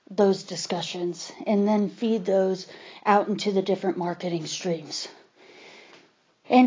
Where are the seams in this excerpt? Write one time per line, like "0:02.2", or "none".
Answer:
none